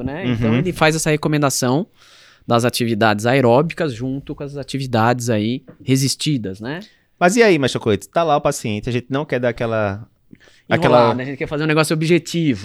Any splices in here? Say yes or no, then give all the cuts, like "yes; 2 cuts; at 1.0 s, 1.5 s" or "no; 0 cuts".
no; 0 cuts